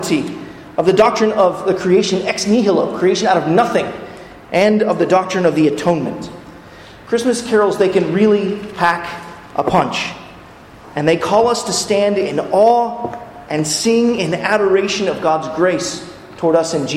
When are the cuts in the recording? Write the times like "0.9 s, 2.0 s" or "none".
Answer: none